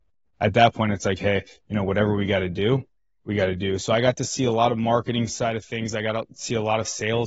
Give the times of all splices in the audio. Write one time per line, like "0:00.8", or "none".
none